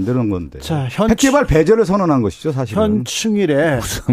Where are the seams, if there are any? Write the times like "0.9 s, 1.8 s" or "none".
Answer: none